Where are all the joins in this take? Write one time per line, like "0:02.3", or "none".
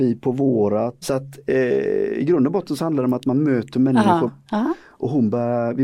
0:01.0
0:04.3